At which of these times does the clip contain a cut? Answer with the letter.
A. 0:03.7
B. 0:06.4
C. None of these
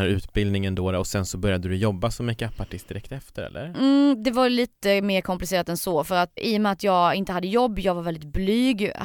B